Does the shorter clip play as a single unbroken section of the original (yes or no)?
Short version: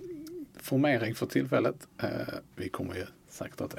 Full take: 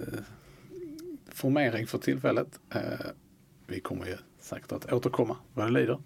no